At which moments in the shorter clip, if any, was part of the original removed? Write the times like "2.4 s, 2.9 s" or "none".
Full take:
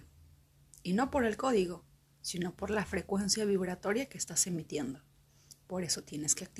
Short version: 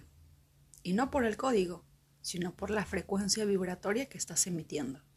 none